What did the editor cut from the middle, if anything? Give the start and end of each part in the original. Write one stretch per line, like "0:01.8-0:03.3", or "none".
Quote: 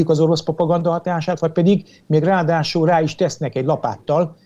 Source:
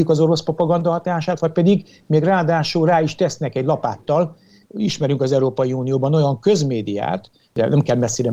none